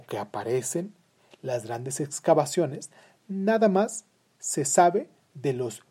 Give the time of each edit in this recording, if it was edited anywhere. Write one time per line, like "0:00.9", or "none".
none